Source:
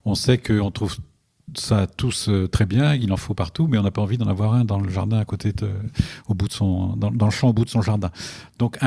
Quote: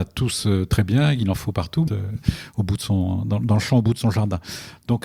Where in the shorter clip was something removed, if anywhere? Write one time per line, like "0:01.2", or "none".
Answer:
0:01.9